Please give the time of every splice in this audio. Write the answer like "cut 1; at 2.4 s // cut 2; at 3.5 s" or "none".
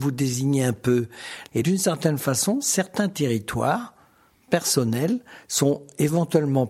cut 1; at 1.6 s